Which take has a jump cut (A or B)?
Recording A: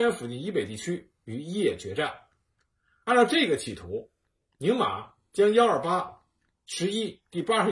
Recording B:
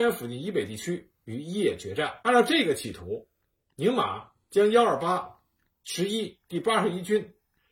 B